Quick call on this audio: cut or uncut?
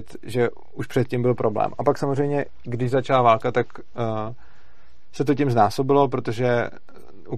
uncut